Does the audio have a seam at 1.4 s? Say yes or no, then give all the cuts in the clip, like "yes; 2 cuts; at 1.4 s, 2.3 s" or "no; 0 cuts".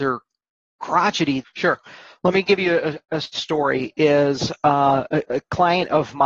yes; 1 cut; at 1.4 s